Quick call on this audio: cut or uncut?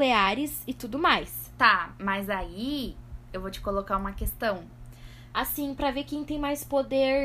cut